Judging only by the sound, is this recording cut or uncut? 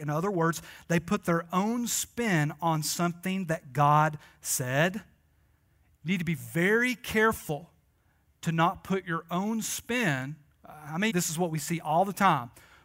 cut